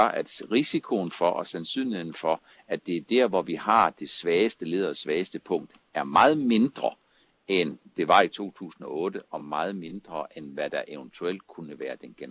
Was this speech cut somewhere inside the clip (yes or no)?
no